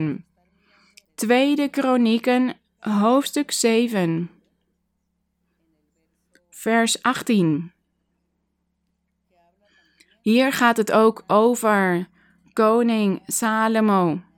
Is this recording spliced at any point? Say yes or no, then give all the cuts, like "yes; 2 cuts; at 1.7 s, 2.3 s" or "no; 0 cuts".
yes; 1 cut; at 1.1 s